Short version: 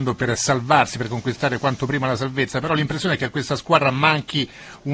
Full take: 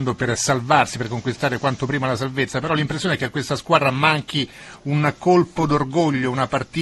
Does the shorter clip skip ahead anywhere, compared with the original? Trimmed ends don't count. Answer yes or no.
no